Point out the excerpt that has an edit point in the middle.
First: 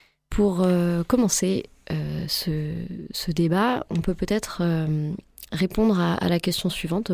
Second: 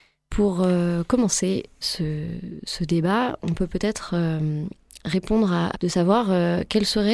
second; 2 cuts; at 1.8 s, 5.7 s

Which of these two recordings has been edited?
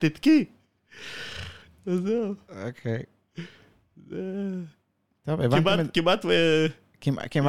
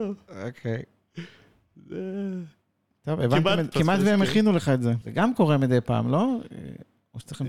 second; 2 cuts; at 3.7 s, 5.0 s

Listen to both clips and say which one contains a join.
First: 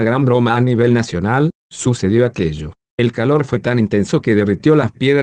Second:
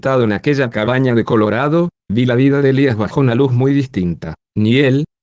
first; 1 cut; at 2.9 s

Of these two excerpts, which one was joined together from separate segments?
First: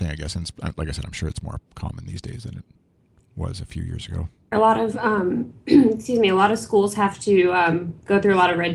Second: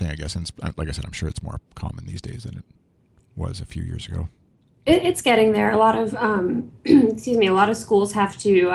first; 1 cut; at 4.5 s

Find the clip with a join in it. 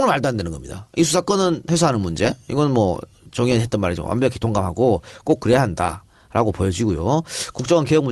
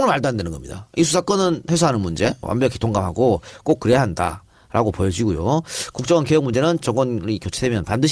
second; 1 cut; at 2.4 s

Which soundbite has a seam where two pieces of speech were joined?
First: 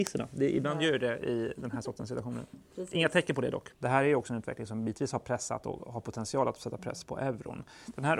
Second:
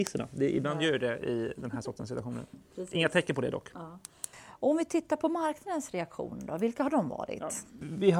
first; 2 cuts; at 3.7 s, 7.0 s

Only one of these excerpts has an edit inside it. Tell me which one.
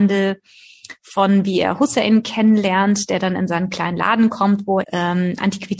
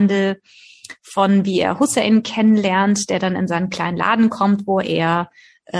first; 1 cut; at 4.8 s

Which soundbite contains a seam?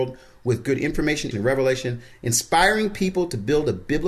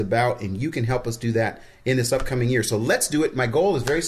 first; 1 cut; at 1.3 s

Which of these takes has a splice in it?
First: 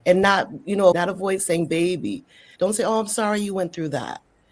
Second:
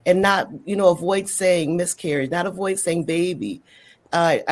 first; 2 cuts; at 0.9 s, 2.6 s

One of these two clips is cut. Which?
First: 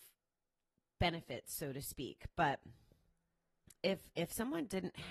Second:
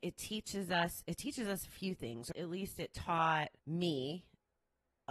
second; 2 cuts; at 2.3 s, 3.6 s

